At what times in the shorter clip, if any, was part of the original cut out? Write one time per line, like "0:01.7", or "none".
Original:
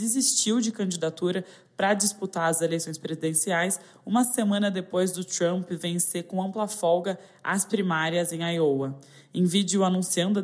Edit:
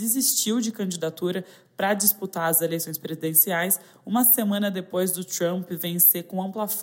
none